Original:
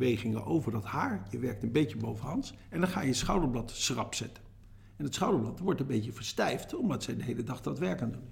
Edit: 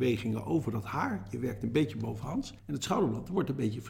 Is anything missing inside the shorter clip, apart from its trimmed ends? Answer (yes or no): yes